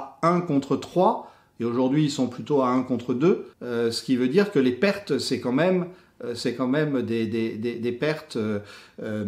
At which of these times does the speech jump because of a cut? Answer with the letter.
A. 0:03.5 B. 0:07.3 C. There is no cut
A